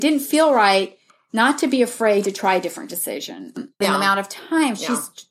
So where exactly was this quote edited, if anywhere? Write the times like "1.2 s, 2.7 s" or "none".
3.8 s